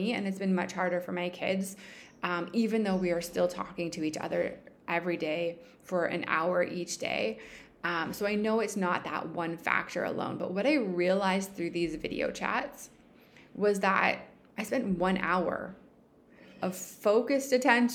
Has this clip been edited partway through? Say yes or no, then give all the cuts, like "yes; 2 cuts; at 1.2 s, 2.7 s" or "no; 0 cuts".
no; 0 cuts